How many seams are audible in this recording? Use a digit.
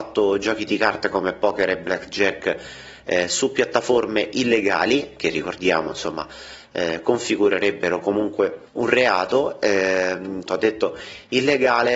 2